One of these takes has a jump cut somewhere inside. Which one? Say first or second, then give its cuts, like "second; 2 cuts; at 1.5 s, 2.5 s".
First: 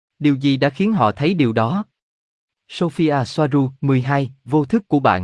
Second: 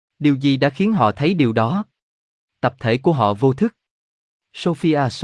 first; 2 cuts; at 2.5 s, 3.8 s